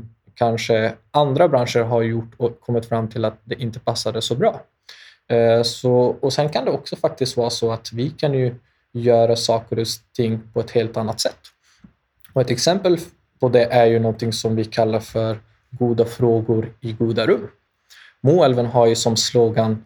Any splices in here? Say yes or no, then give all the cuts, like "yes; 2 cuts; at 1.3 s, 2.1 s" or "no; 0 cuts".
yes; 1 cut; at 6.2 s